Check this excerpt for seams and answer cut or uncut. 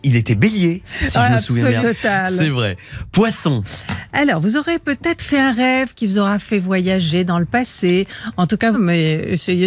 cut